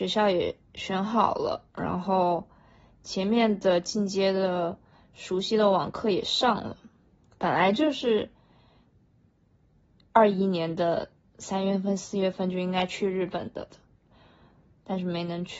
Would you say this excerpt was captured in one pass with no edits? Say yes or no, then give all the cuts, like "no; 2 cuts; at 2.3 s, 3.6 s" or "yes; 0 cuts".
yes; 0 cuts